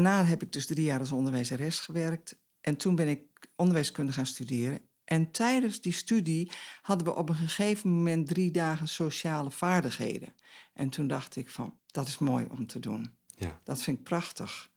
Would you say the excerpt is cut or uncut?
cut